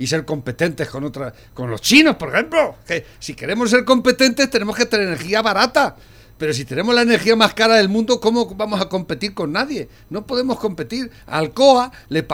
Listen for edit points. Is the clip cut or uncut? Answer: uncut